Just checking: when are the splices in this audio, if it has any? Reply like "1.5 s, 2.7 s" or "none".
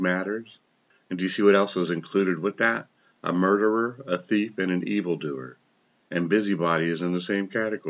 none